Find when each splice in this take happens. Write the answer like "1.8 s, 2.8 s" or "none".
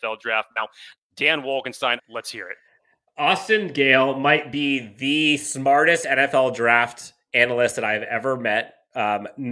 1.0 s, 2.0 s